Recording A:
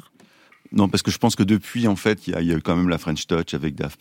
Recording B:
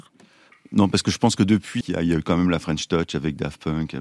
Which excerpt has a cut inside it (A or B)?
B